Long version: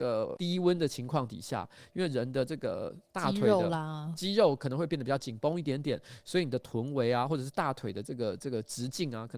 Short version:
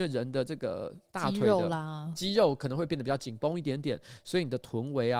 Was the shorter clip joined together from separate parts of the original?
no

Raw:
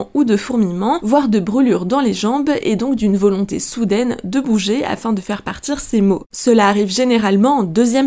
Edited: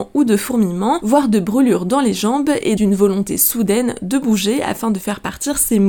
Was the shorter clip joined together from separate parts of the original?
yes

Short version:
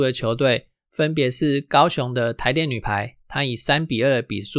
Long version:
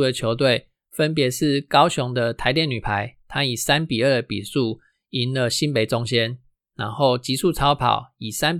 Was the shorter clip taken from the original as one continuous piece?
yes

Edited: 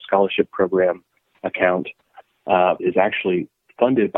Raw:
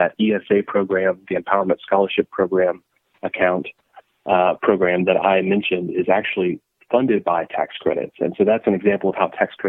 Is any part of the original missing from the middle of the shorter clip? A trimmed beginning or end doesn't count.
yes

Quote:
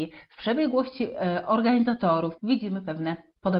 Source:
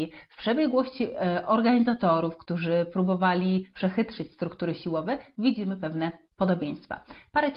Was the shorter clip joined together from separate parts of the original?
yes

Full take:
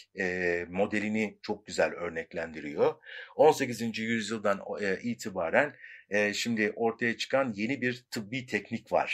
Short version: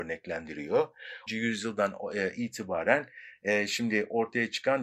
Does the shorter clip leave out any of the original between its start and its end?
yes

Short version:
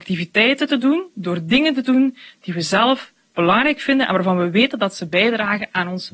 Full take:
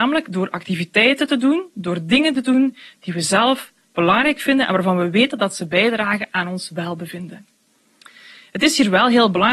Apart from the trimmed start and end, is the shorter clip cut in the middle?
no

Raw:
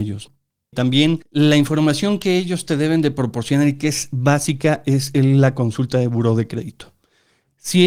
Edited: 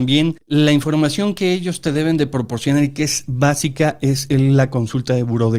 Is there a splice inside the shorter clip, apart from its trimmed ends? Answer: no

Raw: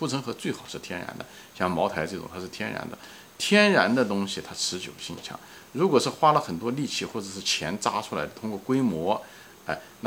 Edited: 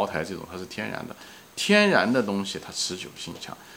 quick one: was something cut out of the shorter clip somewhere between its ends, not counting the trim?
no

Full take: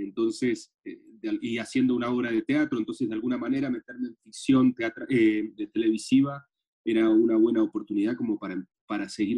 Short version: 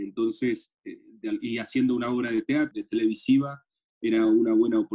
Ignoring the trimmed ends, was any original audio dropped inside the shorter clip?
yes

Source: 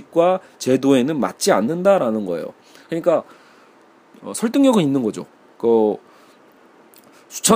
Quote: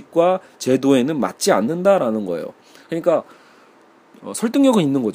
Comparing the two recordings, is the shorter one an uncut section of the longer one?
yes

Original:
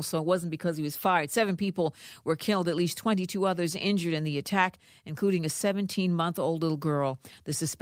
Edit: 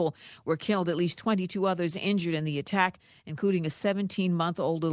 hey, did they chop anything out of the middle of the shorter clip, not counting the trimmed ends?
no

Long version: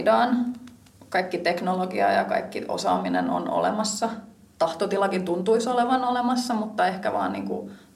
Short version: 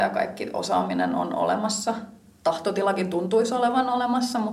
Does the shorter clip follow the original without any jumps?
yes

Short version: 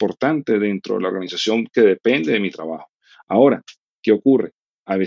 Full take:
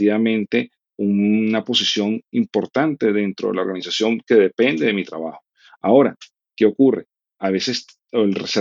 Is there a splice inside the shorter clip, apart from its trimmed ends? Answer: no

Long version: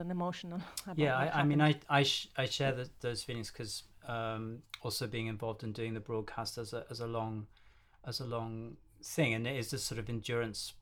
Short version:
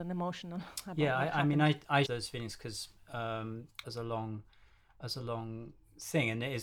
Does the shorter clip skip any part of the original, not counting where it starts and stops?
yes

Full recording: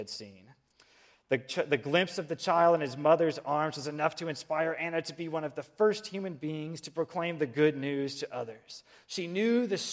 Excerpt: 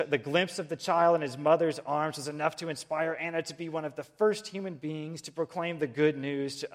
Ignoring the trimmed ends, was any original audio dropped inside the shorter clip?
no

